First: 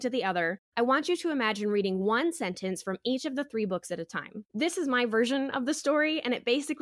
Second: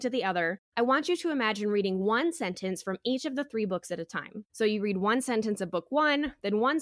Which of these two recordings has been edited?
first; 1 cut; at 4.5 s

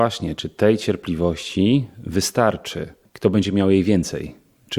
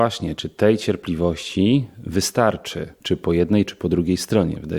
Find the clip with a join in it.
second; 1 cut; at 3.0 s

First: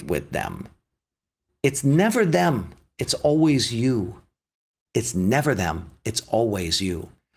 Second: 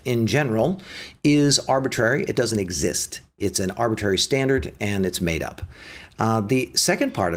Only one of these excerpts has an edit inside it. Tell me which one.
first; 1 cut; at 4.9 s

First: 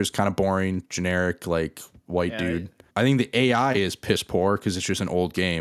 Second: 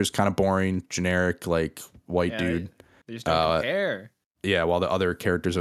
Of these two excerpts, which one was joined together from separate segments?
first; 1 cut; at 2.9 s

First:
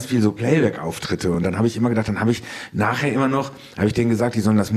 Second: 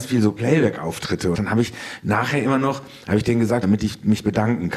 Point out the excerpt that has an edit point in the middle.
second; 2 cuts; at 1.3 s, 3.6 s

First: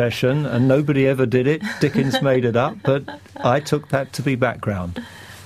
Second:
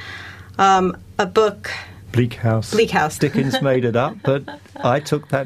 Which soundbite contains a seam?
second; 2 cuts; at 2.1 s, 3.2 s

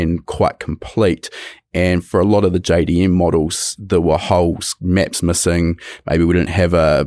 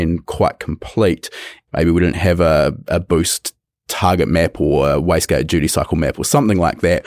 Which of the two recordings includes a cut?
second; 1 cut; at 1.7 s

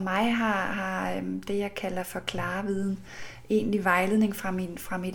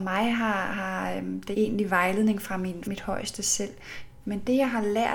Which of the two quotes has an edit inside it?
second; 3 cuts; at 1.5 s, 2.8 s, 4.2 s

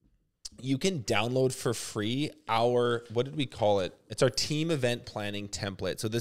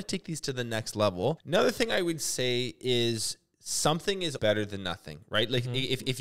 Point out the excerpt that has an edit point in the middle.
second; 2 cuts; at 1.4 s, 4.4 s

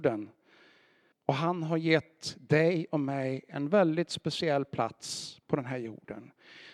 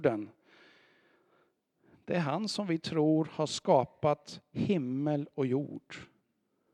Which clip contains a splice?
first; 1 cut; at 1.1 s

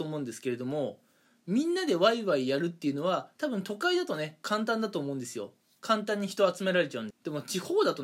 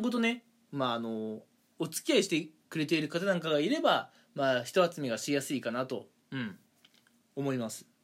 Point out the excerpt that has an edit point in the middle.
first; 1 cut; at 7.1 s

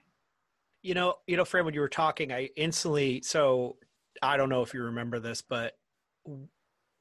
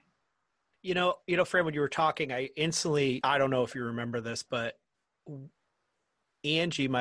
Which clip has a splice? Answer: second; 1 cut; at 3.2 s

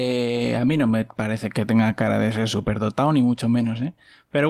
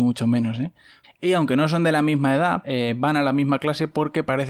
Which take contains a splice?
second; 2 cuts; at 1.0 s, 2.6 s

